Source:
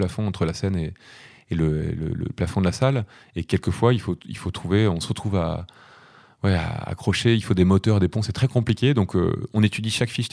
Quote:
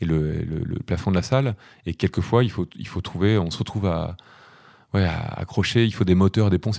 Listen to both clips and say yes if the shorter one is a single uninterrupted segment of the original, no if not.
yes